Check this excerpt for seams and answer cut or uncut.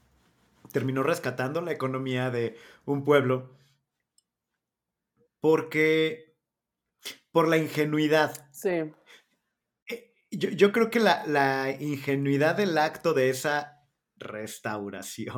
uncut